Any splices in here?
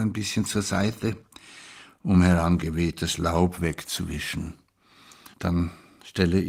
yes; 1 cut; at 5.3 s

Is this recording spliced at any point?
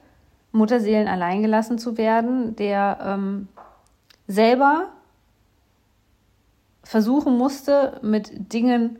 no; 0 cuts

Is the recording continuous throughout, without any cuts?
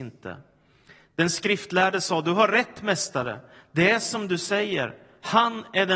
yes; 0 cuts

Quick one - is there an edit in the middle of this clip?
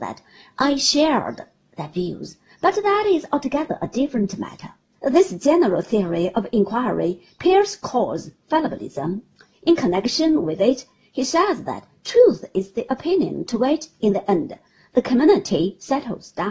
yes; 1 cut; at 5.0 s

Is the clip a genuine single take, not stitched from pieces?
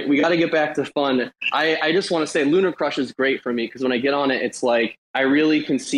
no; 1 cut; at 5.0 s

